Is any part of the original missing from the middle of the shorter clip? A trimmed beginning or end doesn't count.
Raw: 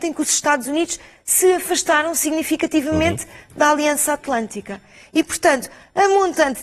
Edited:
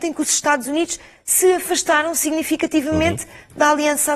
no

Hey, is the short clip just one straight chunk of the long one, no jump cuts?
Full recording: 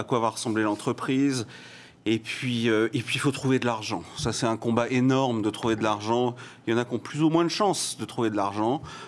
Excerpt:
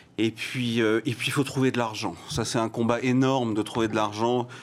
yes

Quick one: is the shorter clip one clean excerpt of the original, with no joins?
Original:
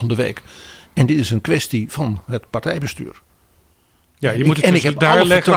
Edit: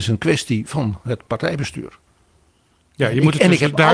yes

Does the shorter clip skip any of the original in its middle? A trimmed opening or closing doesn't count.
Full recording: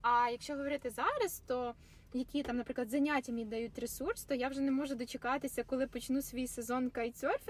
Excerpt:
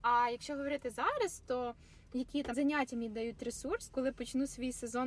yes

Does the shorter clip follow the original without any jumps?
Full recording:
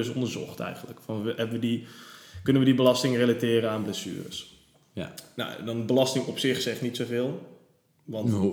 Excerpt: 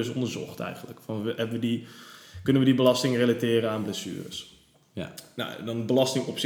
yes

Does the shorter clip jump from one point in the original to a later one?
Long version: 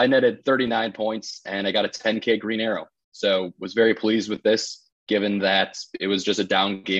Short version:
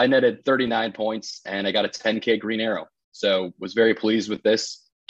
no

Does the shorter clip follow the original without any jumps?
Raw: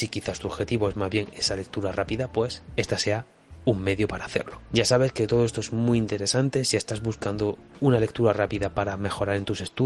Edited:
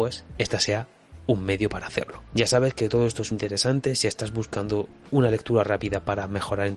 no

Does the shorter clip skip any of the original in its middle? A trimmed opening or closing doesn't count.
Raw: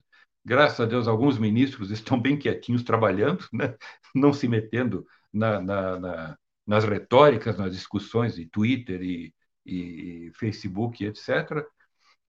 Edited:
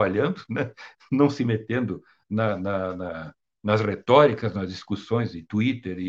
no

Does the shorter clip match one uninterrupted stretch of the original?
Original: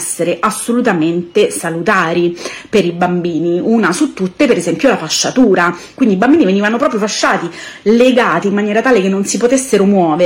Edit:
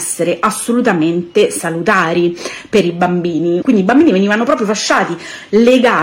no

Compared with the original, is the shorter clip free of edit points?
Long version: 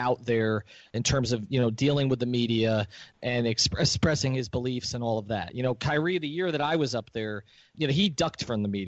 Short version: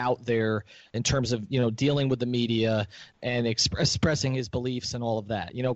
yes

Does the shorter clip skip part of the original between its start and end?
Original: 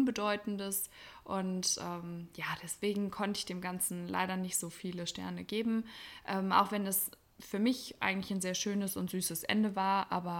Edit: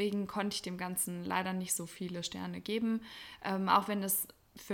no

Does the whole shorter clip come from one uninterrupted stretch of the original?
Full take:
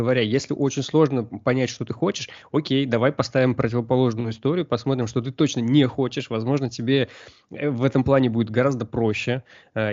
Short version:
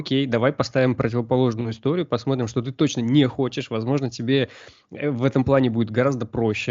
yes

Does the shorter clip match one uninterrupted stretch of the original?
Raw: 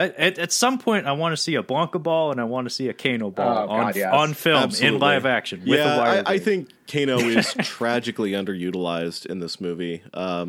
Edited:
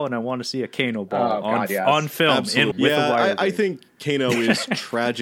no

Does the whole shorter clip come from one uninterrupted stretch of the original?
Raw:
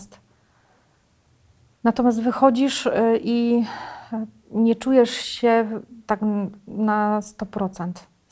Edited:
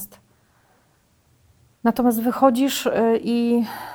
yes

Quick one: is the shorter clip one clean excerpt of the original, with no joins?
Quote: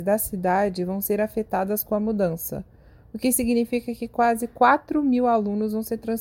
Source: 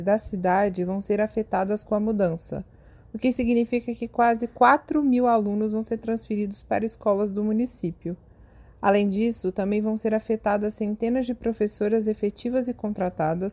yes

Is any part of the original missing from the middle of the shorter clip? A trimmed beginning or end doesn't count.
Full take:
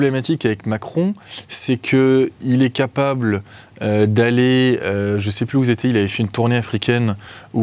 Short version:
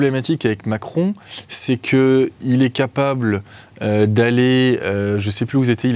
no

